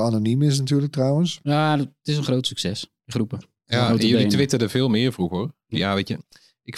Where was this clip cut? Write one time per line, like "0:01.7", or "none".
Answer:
0:03.4
0:05.7

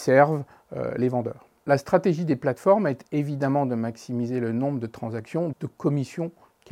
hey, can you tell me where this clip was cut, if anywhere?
0:01.6
0:05.5

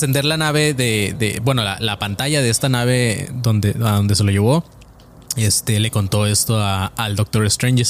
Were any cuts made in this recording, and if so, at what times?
none

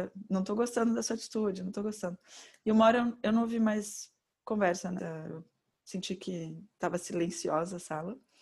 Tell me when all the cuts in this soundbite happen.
0:05.0

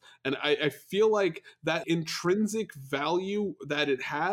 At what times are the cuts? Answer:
0:01.8

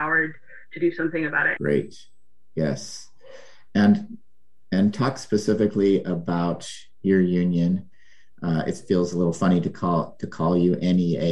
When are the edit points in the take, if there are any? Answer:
0:01.6

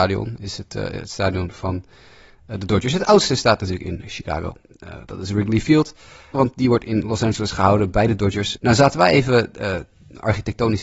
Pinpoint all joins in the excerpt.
0:06.3
0:08.6

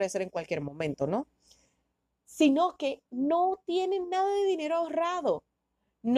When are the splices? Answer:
none

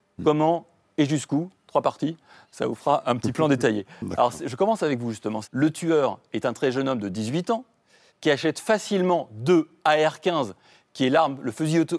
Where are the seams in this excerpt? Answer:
0:05.4
0:08.1

